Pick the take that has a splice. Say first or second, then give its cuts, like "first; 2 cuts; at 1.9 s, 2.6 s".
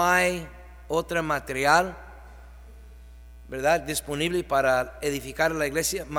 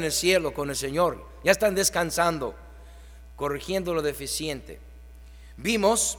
second; 1 cut; at 3.3 s